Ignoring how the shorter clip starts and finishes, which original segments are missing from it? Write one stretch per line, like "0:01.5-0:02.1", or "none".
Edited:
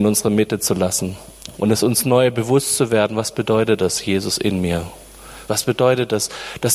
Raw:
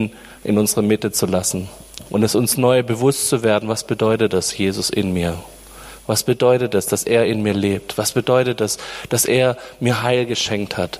0:06.0-0:08.0

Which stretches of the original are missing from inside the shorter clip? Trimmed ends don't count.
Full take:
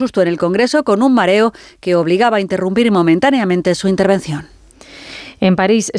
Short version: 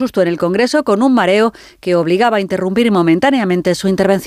none

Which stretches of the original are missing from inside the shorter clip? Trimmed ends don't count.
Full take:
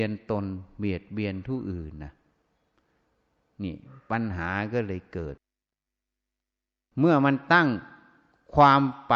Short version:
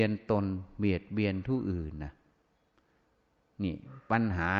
none

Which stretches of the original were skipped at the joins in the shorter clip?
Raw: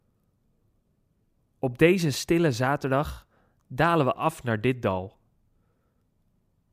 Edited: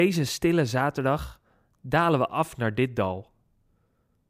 none

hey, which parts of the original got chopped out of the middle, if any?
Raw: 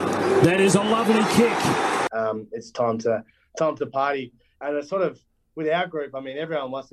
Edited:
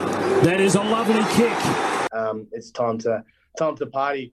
none

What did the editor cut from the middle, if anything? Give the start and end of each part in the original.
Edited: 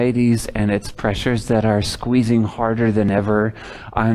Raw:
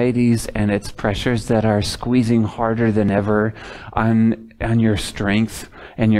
none

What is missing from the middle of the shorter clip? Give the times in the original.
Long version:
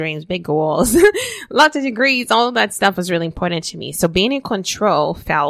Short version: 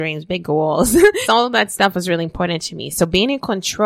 0:01.2-0:02.3

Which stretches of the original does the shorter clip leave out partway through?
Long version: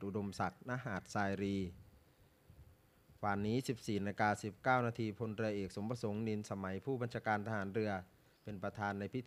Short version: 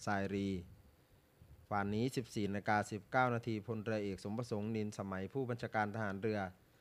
0:02.7-0:03.2

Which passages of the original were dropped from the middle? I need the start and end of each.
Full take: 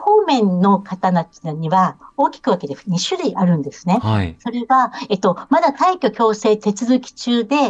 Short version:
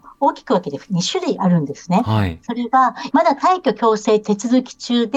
0:05.1-0:05.5

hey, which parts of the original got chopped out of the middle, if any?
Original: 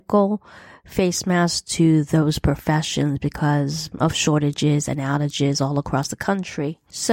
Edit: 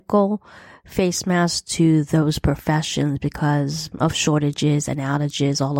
none

